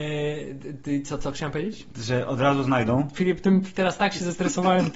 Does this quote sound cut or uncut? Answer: uncut